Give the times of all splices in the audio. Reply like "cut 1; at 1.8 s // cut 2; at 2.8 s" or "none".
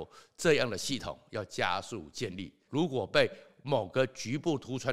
cut 1; at 2.7 s